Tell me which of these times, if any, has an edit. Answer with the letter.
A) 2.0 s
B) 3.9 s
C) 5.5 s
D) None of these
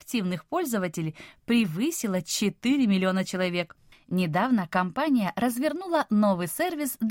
B